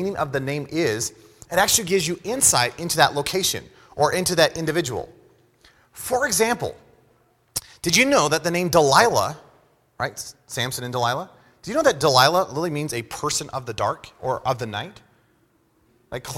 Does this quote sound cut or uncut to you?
uncut